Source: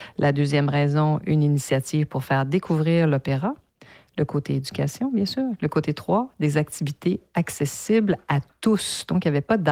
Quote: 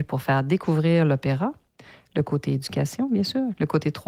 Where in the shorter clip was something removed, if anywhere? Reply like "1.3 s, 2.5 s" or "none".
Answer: none